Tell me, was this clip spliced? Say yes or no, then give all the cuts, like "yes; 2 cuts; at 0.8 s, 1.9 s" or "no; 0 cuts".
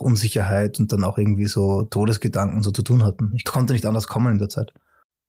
no; 0 cuts